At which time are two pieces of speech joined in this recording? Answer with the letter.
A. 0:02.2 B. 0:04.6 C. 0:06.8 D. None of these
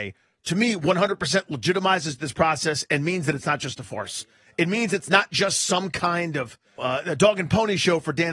C